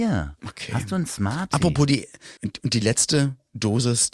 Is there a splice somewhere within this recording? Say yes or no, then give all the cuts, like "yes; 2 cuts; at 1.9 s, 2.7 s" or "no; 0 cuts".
yes; 1 cut; at 2.4 s